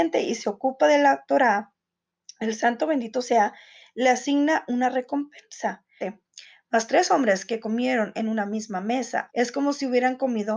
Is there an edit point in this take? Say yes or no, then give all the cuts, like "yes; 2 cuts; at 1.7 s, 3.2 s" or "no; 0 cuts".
yes; 2 cuts; at 6.0 s, 9.3 s